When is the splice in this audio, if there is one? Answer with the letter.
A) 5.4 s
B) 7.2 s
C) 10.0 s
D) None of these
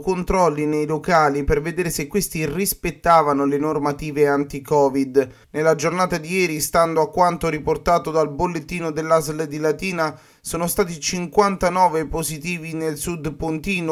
A